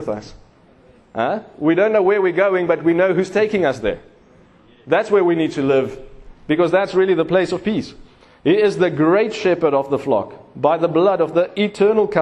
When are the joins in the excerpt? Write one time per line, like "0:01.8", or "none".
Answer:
none